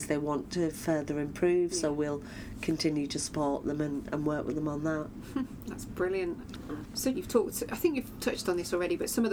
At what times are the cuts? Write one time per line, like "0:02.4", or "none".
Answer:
0:07.1